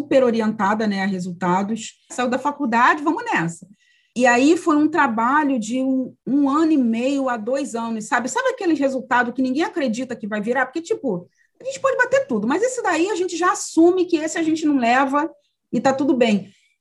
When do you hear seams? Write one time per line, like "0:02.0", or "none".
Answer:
0:02.1